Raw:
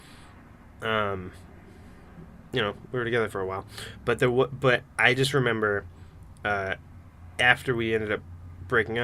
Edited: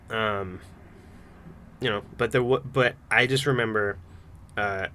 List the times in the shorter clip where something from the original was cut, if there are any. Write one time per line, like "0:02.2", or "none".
0:02.1

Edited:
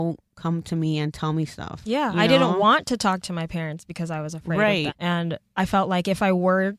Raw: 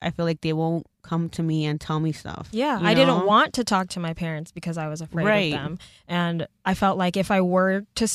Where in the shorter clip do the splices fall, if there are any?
0:04.9

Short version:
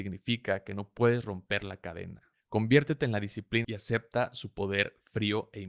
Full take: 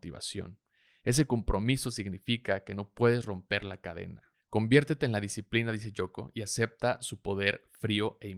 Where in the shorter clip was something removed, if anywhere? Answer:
0:03.6

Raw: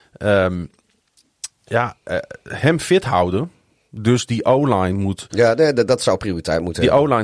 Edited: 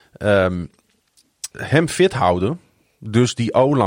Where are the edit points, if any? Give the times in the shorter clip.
0:01.5

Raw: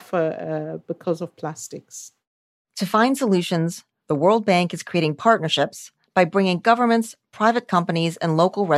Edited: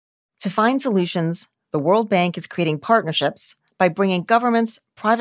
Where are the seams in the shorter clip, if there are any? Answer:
none

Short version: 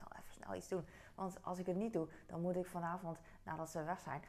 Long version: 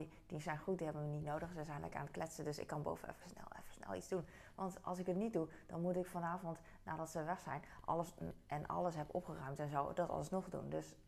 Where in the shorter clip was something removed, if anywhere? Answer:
none

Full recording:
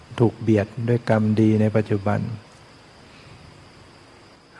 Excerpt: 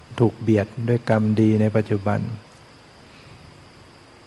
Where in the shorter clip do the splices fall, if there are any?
none

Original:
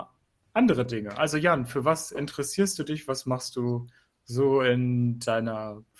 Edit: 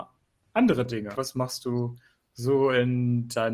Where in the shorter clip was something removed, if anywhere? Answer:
0:01.1

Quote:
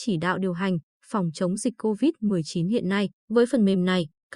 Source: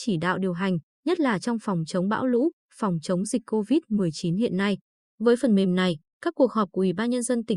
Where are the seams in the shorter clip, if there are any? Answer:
0:01.0
0:03.2

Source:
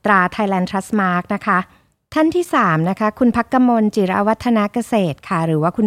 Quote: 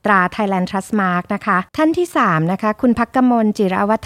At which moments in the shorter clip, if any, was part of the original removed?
0:01.7

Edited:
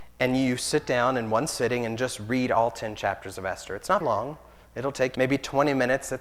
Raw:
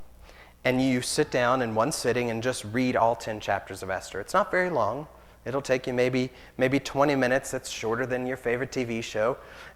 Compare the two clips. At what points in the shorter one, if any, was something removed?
0:04.0
0:05.1

